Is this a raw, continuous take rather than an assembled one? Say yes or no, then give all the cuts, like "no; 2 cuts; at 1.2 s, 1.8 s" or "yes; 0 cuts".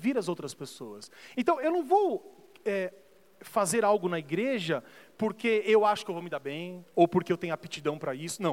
no; 1 cut; at 1.3 s